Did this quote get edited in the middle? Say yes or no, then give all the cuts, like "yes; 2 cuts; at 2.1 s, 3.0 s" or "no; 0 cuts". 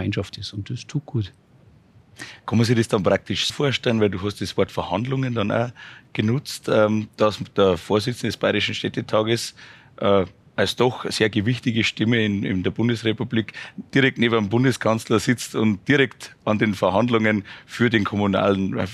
yes; 1 cut; at 3.5 s